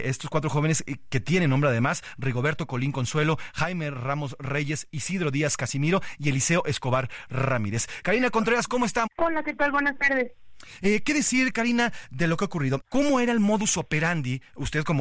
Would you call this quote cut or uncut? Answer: cut